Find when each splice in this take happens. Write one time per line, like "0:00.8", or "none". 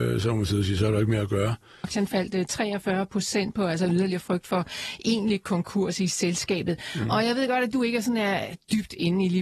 0:01.8